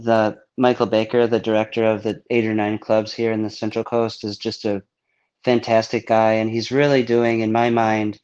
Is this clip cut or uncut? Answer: uncut